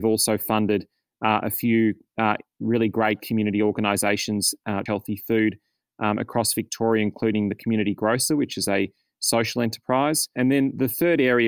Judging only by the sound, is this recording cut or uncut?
cut